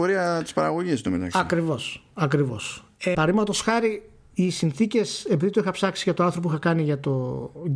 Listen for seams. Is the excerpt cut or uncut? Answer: cut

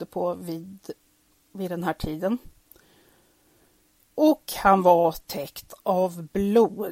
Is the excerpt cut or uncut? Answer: uncut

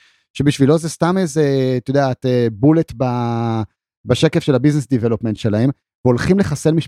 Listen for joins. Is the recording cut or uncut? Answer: uncut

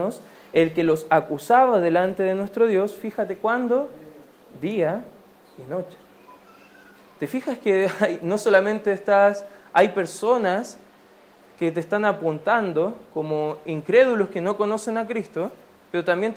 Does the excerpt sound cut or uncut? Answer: uncut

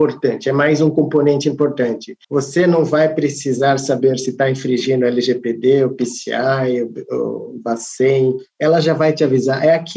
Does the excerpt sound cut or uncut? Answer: cut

